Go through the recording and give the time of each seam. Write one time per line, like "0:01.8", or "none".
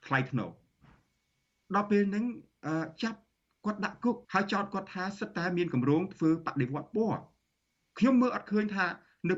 0:04.2